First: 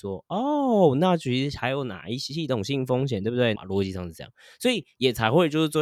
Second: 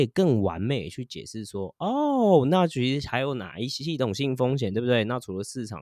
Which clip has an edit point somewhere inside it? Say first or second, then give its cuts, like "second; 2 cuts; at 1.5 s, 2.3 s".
first; 1 cut; at 3.6 s